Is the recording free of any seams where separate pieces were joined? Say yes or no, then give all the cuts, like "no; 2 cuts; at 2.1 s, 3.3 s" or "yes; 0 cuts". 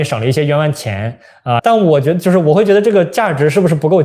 no; 1 cut; at 1.6 s